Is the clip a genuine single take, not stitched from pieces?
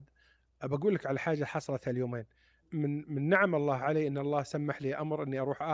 no; 1 cut; at 2.6 s

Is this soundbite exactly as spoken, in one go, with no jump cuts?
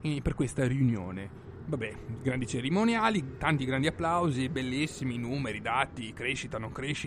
yes; 0 cuts

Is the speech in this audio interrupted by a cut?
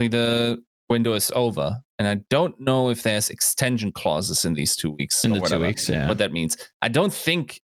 no; 0 cuts

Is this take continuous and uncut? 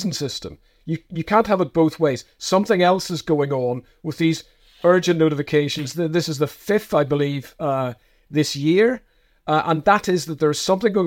yes; 0 cuts

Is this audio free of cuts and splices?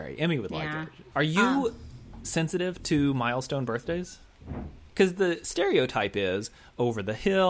no; 1 cut; at 1.1 s

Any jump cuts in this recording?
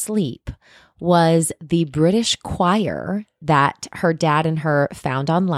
no; 0 cuts

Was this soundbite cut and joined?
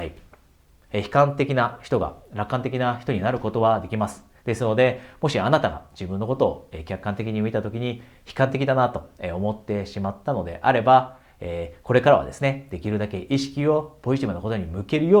yes; 1 cut; at 4.4 s

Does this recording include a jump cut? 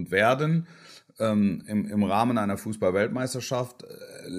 no; 0 cuts

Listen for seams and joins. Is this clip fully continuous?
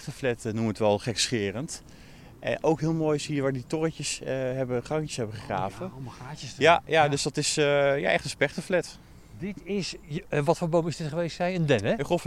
yes; 0 cuts

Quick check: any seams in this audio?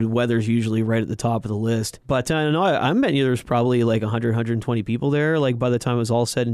yes; 1 cut; at 2.0 s

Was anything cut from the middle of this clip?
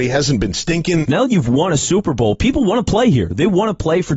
yes; 1 cut; at 1.1 s

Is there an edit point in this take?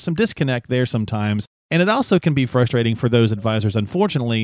no; 0 cuts

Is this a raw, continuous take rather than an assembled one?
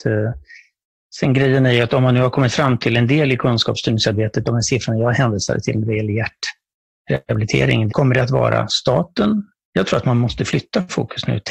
no; 3 cuts; at 4.4 s, 7.9 s, 9.6 s

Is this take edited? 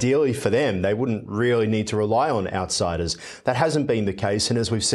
no; 0 cuts

